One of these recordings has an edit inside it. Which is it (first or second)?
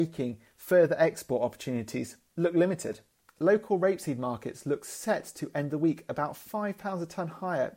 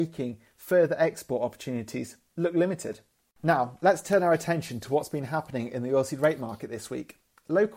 first